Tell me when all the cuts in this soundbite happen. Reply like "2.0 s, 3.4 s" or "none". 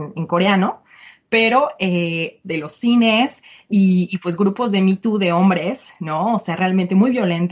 2.4 s

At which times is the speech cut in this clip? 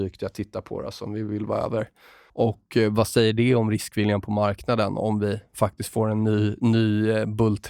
2.3 s

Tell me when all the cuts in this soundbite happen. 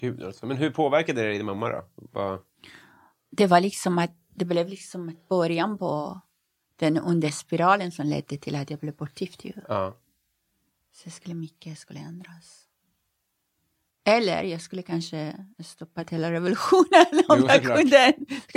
none

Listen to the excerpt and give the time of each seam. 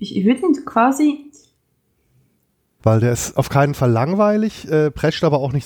2.8 s

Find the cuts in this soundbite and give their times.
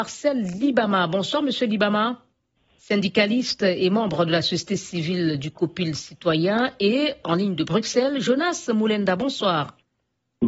2.8 s, 7.2 s

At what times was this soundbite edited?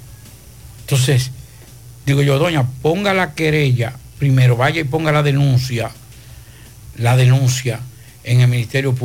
none

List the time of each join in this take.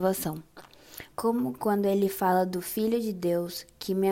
1.1 s

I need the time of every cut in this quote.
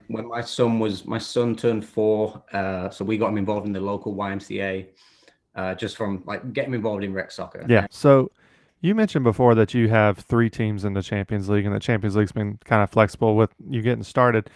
7.9 s

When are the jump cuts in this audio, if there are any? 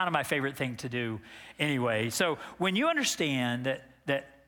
none

